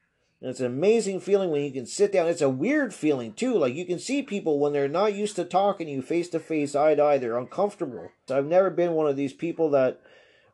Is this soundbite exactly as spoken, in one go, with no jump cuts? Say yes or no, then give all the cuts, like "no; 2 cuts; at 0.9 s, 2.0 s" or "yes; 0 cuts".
no; 1 cut; at 8.3 s